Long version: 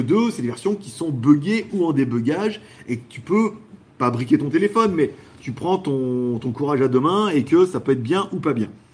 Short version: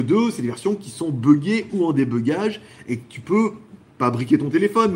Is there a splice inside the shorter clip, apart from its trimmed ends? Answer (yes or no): no